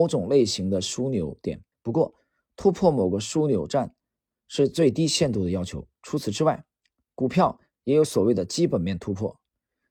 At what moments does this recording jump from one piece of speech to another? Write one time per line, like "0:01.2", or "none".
0:01.7